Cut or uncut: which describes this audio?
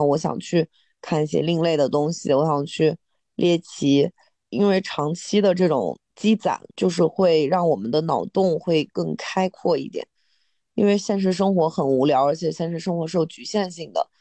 uncut